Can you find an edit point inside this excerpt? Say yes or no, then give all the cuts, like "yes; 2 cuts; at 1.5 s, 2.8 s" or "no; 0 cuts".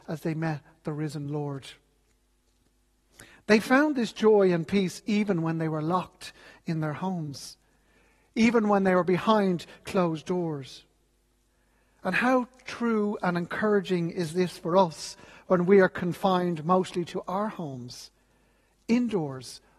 no; 0 cuts